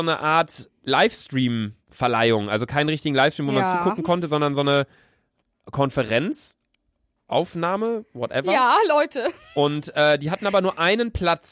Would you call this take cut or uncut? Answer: uncut